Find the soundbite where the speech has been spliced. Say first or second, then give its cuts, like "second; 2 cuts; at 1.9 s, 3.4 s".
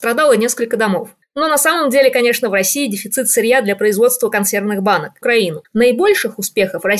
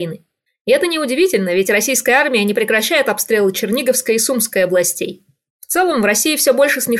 first; 2 cuts; at 1.2 s, 5.2 s